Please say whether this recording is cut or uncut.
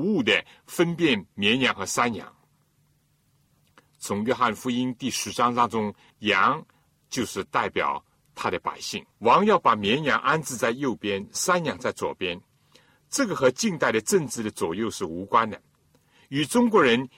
cut